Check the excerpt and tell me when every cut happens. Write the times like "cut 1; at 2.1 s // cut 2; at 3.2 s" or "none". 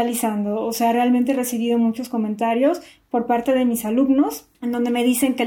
cut 1; at 4.5 s